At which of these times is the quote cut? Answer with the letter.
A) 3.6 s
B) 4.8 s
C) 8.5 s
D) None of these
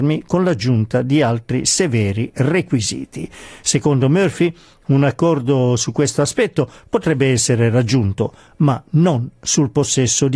D